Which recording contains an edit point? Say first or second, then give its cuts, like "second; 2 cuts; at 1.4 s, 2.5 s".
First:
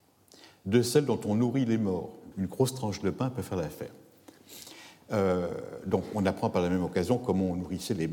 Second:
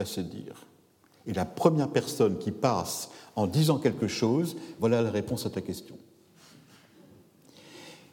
first; 1 cut; at 2.3 s